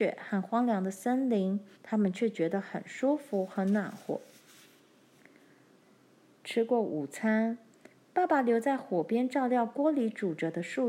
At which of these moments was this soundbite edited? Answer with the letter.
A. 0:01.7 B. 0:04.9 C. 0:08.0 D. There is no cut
A